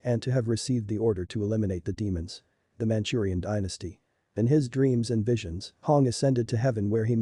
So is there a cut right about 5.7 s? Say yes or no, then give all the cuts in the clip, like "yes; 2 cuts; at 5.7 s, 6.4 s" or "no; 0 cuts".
no; 1 cut; at 4.3 s